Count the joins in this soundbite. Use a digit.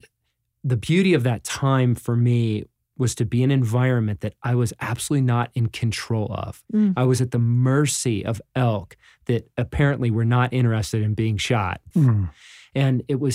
2